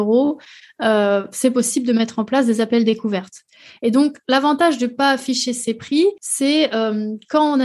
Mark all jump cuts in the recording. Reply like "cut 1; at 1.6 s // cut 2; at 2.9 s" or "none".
cut 1; at 6.2 s